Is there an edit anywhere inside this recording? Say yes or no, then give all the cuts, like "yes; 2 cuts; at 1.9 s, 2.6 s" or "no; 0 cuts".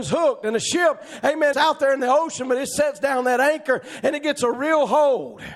yes; 1 cut; at 1.5 s